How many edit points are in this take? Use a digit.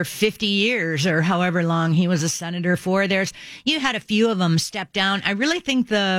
0